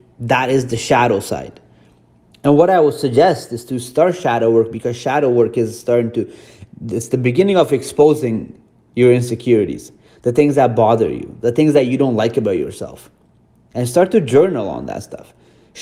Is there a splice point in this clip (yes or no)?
yes